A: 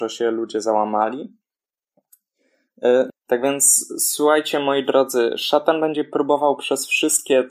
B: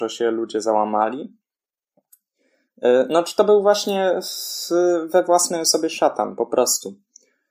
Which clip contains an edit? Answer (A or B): A